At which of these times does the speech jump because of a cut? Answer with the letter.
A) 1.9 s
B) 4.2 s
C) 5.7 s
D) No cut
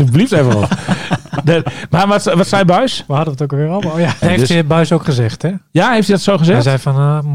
B